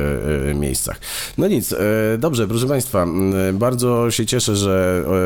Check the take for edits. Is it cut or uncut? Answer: uncut